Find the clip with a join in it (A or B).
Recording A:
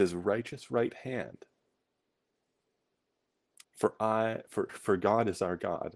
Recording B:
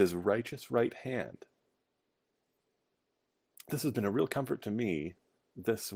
A